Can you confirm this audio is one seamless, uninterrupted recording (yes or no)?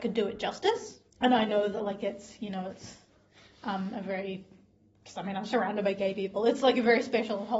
no